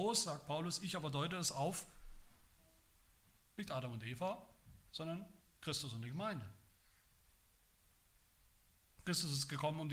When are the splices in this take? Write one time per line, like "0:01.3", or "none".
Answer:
0:09.0